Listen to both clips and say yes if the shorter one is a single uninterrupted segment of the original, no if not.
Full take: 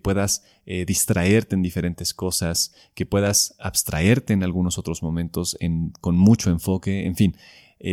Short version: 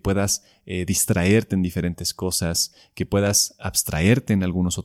yes